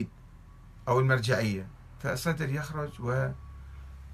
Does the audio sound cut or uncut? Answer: uncut